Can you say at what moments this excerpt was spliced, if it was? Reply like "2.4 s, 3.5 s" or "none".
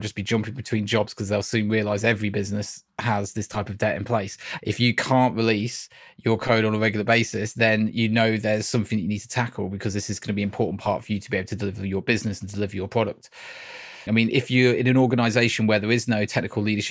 4.6 s, 14.1 s